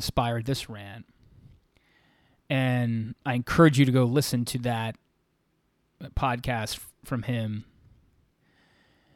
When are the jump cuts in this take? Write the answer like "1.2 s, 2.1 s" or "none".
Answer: none